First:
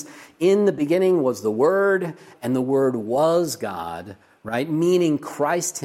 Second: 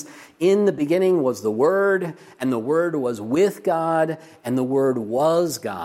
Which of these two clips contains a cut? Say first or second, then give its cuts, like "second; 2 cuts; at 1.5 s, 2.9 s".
first; 1 cut; at 2.3 s